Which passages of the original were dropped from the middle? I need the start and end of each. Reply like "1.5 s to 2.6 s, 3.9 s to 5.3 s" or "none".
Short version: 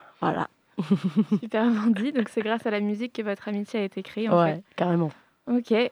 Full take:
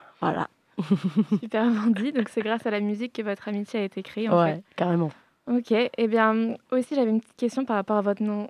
none